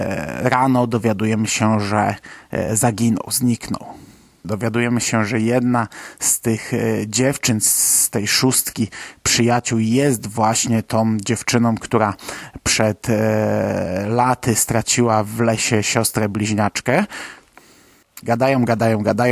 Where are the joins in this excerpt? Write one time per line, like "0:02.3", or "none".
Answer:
0:04.4
0:18.2